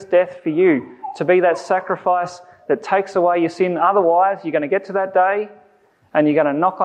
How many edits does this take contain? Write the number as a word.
zero